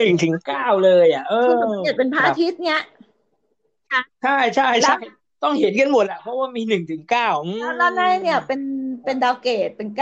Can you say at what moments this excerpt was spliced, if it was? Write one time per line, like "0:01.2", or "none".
0:04.1